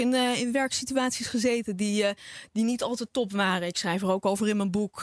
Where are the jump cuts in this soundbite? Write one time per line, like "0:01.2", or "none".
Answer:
none